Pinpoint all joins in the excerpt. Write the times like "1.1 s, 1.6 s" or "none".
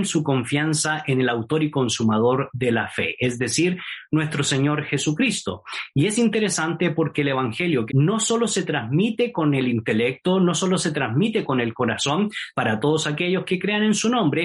7.9 s, 12.5 s